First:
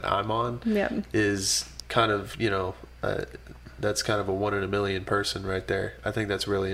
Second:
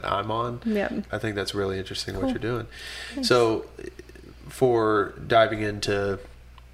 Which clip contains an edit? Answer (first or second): second